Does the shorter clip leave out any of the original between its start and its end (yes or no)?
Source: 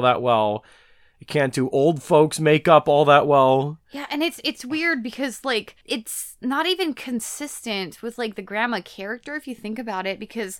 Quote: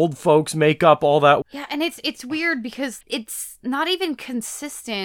yes